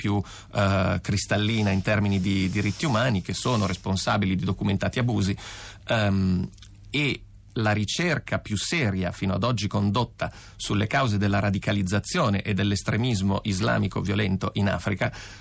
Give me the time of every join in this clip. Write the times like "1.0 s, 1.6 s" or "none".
none